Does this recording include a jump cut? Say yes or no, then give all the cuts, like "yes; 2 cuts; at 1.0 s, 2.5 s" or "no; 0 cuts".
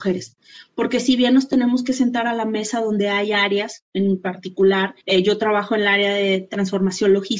yes; 1 cut; at 5.0 s